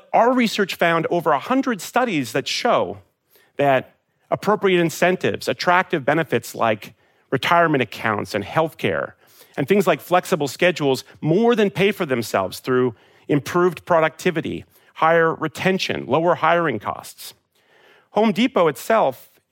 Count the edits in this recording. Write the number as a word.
zero